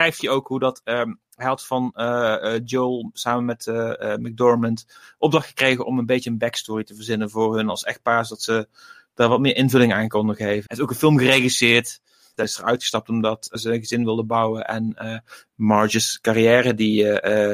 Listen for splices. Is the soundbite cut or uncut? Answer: cut